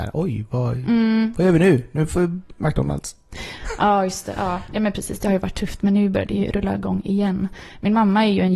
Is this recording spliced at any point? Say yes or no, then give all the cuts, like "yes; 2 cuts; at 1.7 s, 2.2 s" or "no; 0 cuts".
no; 0 cuts